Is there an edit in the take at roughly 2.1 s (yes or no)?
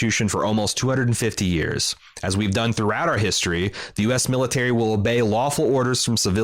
no